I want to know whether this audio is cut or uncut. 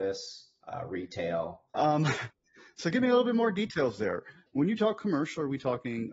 cut